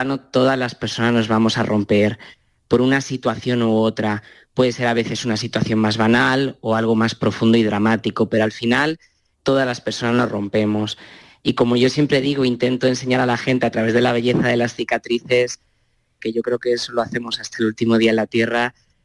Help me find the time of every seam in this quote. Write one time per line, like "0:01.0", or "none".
0:09.3
0:16.2